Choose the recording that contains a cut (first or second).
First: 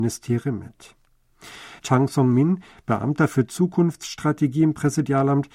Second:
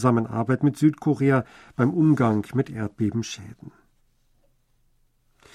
first